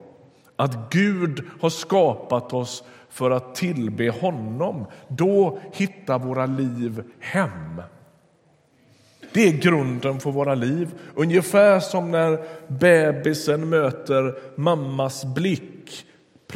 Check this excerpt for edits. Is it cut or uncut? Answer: uncut